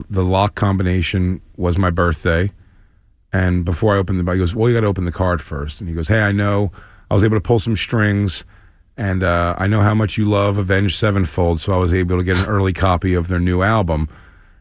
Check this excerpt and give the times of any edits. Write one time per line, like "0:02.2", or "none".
none